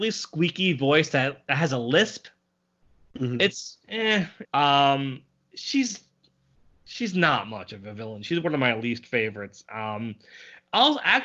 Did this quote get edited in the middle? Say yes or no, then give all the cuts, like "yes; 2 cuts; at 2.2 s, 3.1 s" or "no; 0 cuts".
yes; 1 cut; at 4.4 s